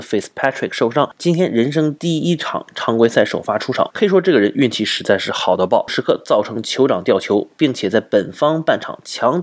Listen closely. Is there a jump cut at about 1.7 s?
no; 2 cuts; at 3.9 s, 5.9 s

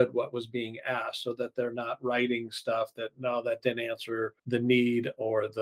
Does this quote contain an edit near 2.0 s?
no; 1 cut; at 4.4 s

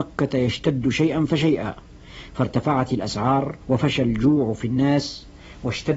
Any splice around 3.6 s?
yes; 1 cut; at 3.6 s

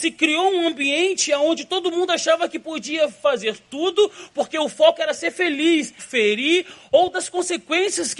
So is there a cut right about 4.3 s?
no; 1 cut; at 6.0 s

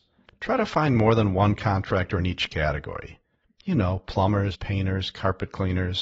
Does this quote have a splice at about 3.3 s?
no; 1 cut; at 4.5 s

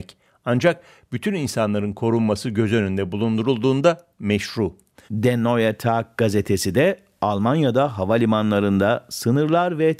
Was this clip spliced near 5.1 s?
yes; 1 cut; at 5.1 s

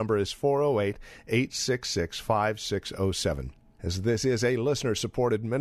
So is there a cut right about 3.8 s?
yes; 1 cut; at 3.8 s

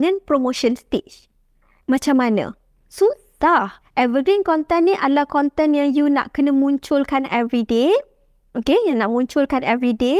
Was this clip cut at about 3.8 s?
yes; 2 cuts; at 1.8 s, 3.8 s

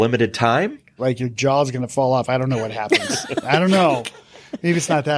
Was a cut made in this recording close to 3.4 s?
no; 1 cut; at 1.0 s

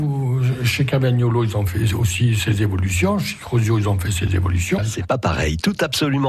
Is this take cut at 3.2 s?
no; 1 cut; at 4.8 s

